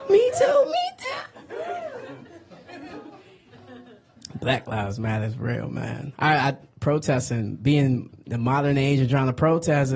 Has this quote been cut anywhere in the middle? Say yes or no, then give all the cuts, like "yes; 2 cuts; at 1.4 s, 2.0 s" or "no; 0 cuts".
no; 0 cuts